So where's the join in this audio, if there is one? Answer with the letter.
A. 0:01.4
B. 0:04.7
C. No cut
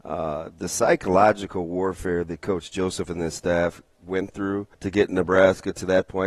B